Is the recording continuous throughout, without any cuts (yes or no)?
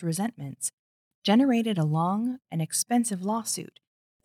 no